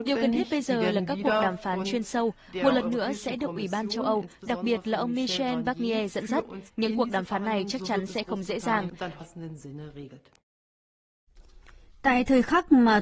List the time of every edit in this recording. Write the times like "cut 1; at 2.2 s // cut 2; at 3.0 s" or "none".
cut 1; at 6.7 s